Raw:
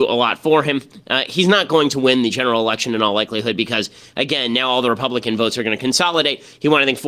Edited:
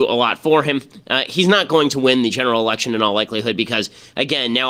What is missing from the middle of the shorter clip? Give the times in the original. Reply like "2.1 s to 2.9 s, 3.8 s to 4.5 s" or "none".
none